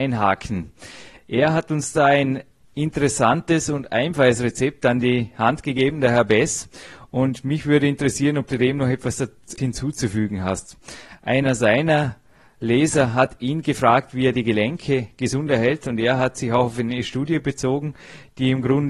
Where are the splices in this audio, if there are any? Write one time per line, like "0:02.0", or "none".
0:09.6